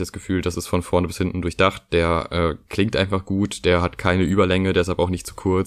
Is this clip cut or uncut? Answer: uncut